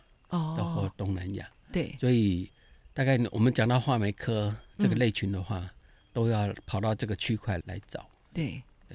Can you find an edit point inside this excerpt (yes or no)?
yes